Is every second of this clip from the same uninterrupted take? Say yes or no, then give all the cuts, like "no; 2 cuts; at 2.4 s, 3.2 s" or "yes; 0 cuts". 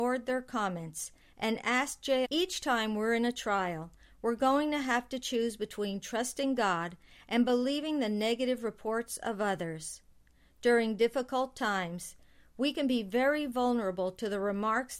no; 1 cut; at 2.2 s